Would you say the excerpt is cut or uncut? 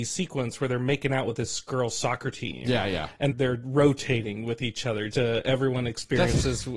cut